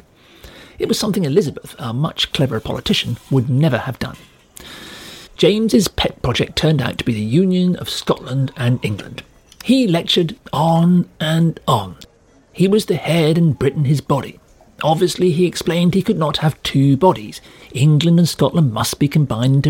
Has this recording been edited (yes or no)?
yes